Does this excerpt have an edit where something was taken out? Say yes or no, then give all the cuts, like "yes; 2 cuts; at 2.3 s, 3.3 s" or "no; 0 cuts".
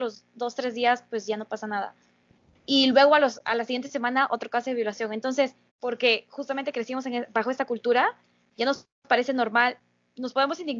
yes; 1 cut; at 5.7 s